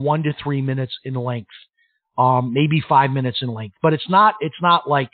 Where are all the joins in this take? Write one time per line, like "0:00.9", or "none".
none